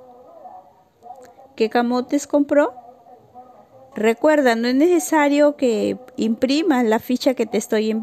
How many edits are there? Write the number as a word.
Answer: two